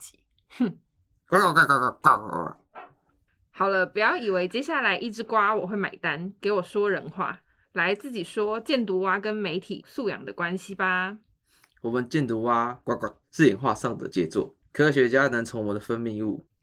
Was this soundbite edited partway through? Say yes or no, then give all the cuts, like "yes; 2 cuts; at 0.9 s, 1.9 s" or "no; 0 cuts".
no; 0 cuts